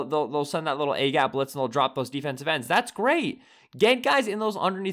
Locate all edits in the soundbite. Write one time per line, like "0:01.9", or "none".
none